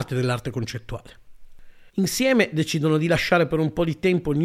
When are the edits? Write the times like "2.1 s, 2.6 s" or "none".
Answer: 1.9 s